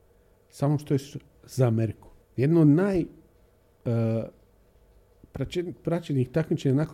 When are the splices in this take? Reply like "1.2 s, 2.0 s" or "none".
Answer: 2.2 s

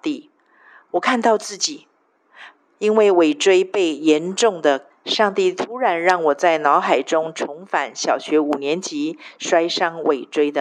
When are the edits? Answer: 4.9 s

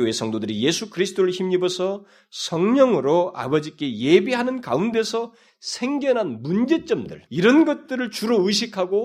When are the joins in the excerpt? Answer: 7.3 s

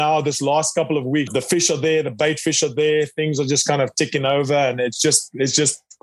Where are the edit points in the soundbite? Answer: 1.3 s

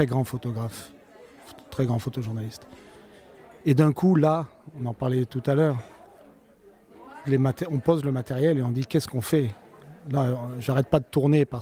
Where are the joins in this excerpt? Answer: 7.2 s

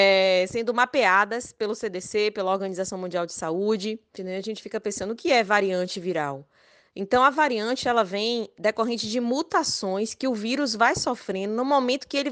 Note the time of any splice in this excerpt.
4.2 s

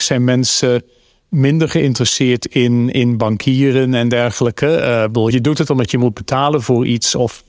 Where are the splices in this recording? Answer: 5.3 s

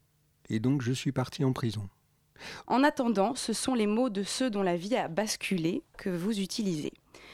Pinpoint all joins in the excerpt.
2.6 s

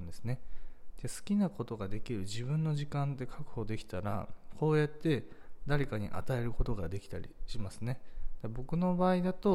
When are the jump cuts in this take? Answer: none

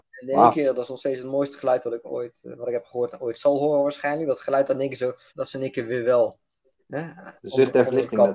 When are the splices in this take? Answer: 5.3 s, 7.4 s

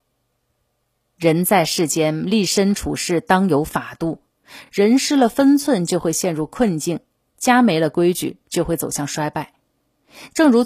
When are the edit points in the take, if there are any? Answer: none

